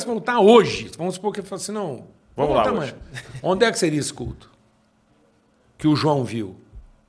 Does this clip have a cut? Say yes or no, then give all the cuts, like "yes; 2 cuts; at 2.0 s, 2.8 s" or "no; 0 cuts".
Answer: no; 0 cuts